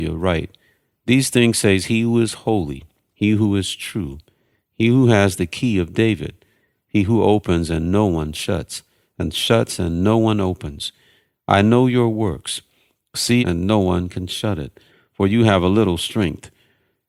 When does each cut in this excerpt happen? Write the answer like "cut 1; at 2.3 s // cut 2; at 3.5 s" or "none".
cut 1; at 13.4 s